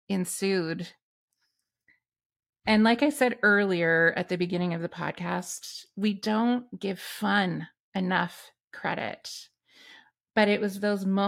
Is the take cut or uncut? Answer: uncut